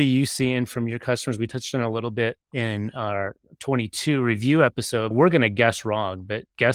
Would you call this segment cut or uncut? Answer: cut